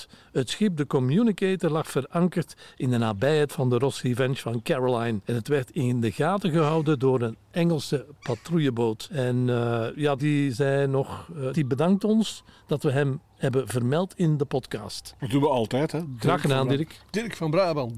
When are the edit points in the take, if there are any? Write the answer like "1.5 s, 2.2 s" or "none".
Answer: 10.2 s, 11.5 s